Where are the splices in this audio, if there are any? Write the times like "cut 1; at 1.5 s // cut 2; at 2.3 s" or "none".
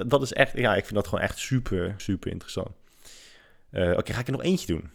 cut 1; at 2.0 s